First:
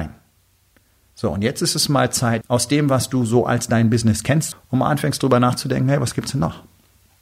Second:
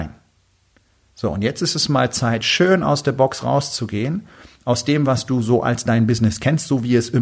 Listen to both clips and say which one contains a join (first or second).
first